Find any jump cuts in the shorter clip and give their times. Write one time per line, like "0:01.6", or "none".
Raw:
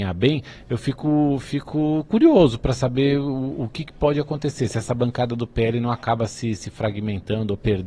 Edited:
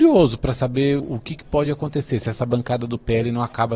0:01.0